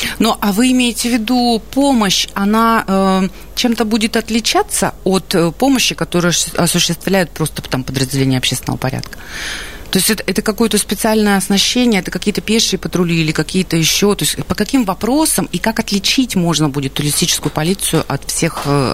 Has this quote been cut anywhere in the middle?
no; 0 cuts

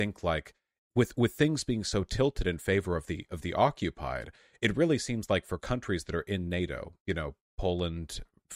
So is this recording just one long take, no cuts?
yes; 0 cuts

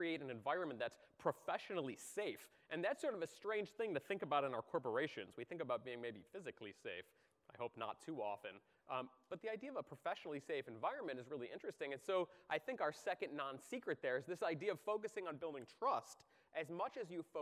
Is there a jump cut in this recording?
no; 0 cuts

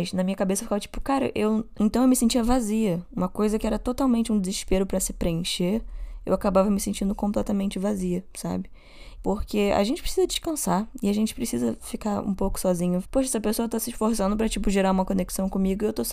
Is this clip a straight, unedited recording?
no; 3 cuts; at 1.8 s, 9.2 s, 13.0 s

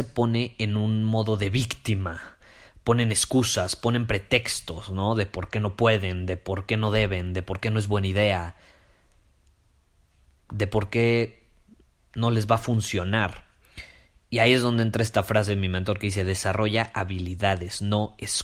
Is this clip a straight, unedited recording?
yes; 0 cuts

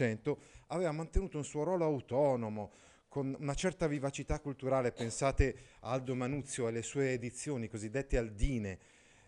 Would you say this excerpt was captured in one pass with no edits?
yes; 0 cuts

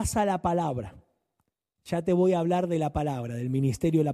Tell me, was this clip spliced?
no; 0 cuts

